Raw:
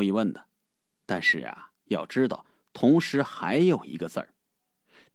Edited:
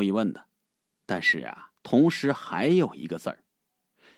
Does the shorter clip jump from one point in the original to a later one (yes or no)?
yes